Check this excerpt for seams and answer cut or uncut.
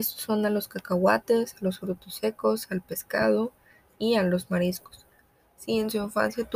uncut